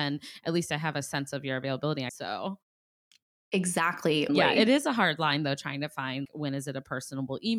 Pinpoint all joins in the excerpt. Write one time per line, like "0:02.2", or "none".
0:02.1
0:04.3
0:06.2